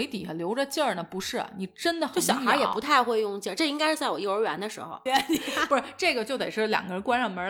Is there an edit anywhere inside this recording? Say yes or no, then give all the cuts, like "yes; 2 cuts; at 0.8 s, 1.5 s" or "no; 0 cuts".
yes; 1 cut; at 5.1 s